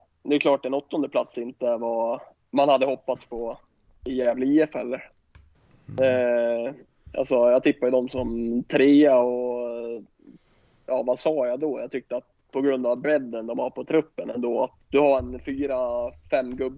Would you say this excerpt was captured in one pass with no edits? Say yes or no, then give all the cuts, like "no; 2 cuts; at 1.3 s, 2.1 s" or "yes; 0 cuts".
no; 1 cut; at 14.8 s